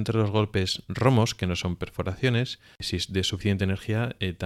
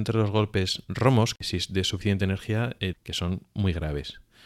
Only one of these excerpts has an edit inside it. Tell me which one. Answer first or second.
second